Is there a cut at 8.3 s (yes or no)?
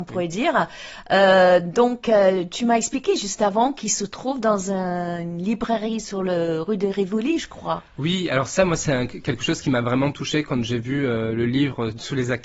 no